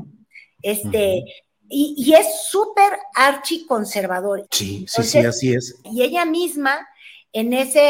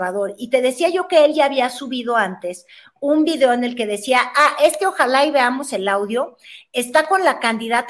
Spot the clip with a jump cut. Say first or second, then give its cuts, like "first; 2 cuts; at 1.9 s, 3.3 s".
first; 2 cuts; at 4.5 s, 5.8 s